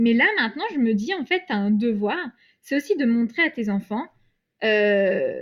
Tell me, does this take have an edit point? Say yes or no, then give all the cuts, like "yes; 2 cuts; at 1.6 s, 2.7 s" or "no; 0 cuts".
no; 0 cuts